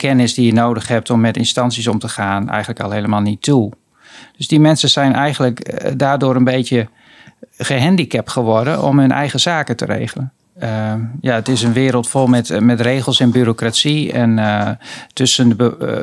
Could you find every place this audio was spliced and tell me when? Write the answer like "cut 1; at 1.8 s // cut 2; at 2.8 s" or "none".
cut 1; at 4.2 s // cut 2; at 10.6 s